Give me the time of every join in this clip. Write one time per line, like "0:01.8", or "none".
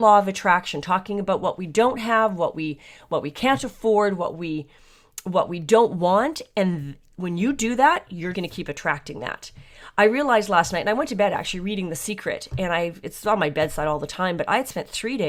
0:08.3